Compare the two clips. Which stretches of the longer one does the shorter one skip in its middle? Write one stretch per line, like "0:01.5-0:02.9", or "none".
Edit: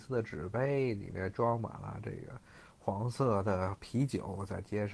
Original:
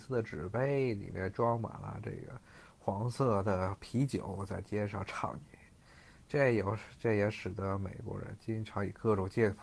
none